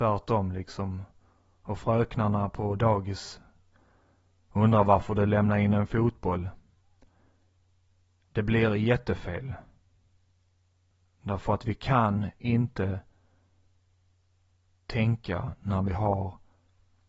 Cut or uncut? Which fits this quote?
uncut